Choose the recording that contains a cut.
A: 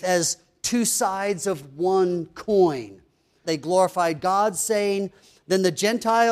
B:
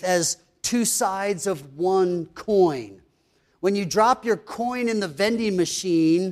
A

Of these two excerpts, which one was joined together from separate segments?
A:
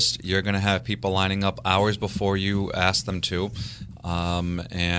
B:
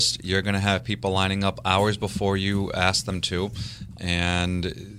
B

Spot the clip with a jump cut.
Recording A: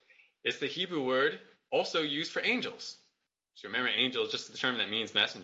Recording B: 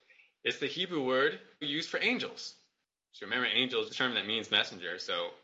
B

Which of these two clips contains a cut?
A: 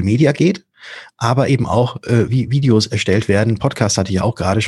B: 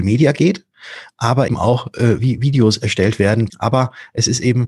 B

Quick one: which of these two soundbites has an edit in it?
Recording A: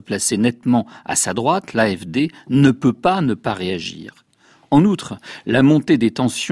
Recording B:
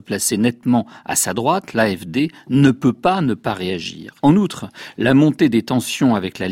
B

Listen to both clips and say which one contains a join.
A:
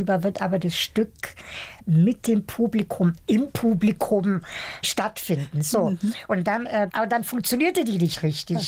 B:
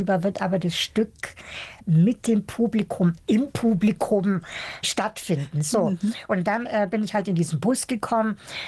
A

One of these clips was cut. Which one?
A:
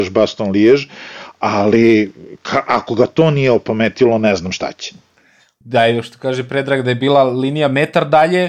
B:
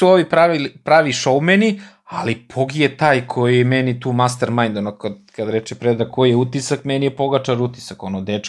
A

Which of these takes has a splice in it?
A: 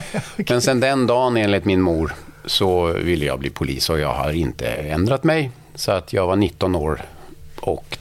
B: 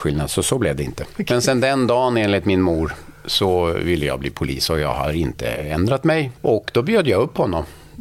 B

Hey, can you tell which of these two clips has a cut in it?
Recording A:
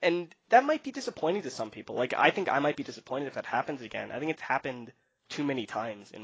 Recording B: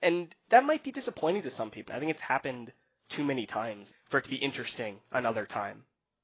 B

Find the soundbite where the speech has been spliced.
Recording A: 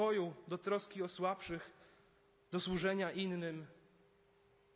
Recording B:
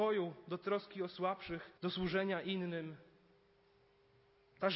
B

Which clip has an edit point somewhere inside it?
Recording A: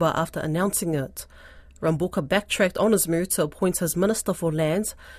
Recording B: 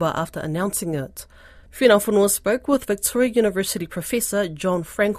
B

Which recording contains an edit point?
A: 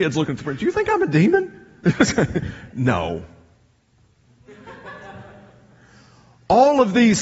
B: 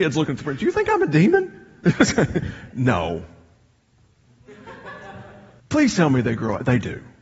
B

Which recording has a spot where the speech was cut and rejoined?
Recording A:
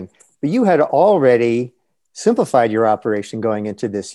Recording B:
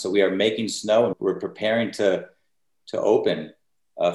B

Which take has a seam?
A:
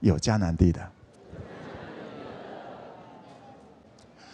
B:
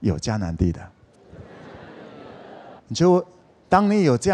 B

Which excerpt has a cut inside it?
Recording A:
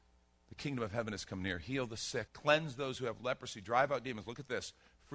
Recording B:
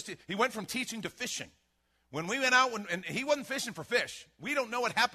A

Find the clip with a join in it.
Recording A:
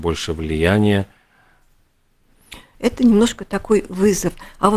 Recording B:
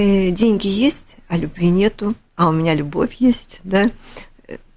A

